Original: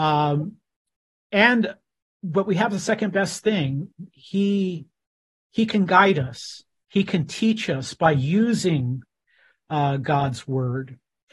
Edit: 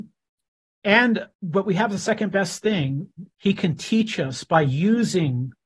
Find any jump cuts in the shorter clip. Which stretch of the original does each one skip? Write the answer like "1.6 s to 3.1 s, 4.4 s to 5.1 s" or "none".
1.8 s to 2.1 s, 4.1 s to 6.8 s